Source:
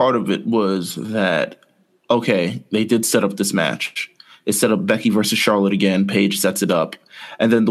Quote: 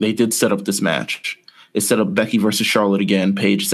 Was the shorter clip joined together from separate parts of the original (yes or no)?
no